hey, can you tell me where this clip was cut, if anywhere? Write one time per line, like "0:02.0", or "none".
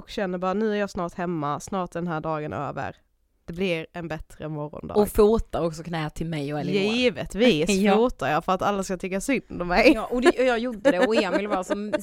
none